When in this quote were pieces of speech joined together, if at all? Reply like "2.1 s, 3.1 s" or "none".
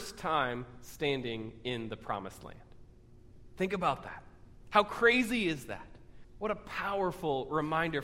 6.2 s